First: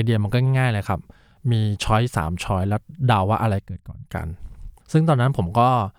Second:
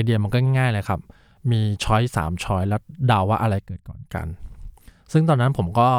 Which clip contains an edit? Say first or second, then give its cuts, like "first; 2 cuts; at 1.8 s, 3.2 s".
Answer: first; 1 cut; at 4.8 s